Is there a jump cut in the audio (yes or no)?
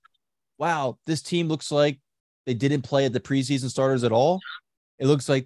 no